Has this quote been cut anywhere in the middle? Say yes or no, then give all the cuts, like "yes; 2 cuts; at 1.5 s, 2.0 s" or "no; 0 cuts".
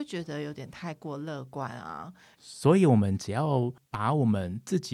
yes; 1 cut; at 2.3 s